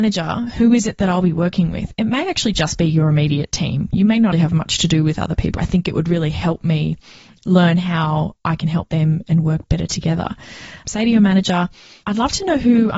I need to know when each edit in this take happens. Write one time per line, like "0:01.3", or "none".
0:04.3
0:05.6
0:10.8